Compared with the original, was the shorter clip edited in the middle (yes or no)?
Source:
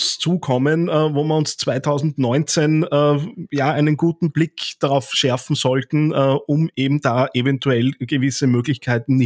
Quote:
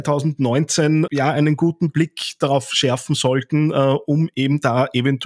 yes